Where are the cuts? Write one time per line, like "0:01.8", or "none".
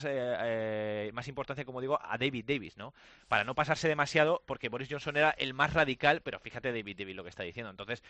none